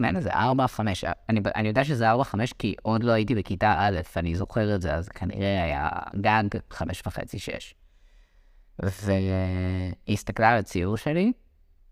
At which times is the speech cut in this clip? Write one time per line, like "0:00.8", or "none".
none

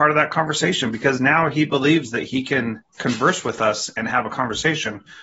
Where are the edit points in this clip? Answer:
0:02.9

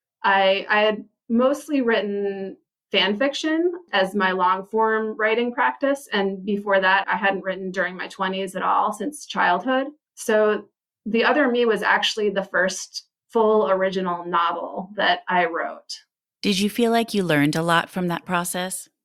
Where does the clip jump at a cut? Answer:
0:07.0
0:16.2

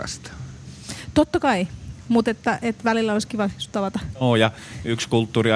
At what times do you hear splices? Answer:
none

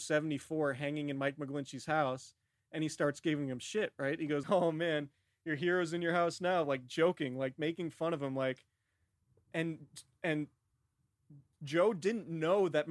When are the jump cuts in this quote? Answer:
0:04.4

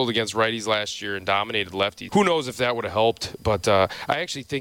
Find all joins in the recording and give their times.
0:02.1

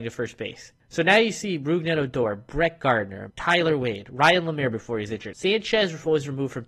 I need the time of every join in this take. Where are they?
0:03.3
0:05.3

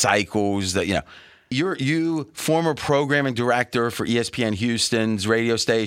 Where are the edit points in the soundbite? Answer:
0:01.5

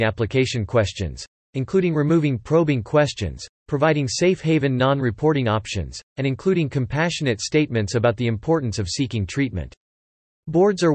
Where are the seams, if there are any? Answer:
none

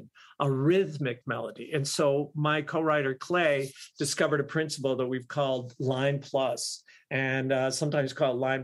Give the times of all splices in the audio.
none

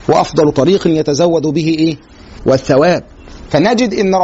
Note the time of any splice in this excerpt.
0:02.4

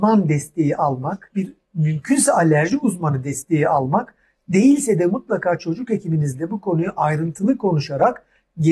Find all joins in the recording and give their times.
none

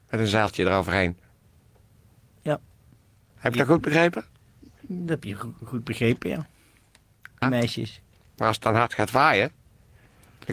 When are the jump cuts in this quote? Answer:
0:03.3
0:07.4

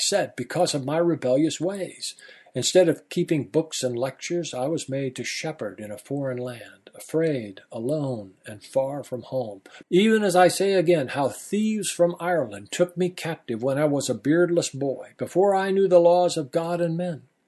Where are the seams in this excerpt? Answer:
0:09.8

